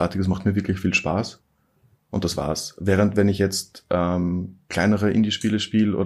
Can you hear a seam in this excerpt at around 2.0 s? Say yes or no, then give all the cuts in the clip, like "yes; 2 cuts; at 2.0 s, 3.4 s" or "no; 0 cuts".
yes; 1 cut; at 2.0 s